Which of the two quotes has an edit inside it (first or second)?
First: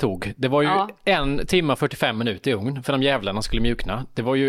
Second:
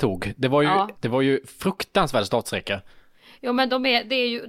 second